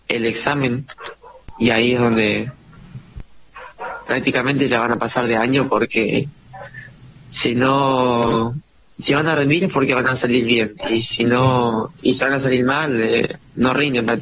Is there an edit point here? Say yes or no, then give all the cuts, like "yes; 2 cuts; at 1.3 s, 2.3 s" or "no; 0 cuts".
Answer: yes; 1 cut; at 4.1 s